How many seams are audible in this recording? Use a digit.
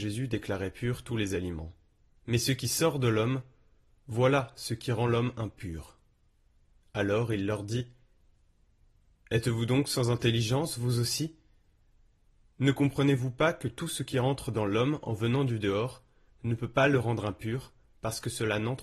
2